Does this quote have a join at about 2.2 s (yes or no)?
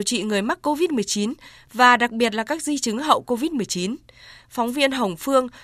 no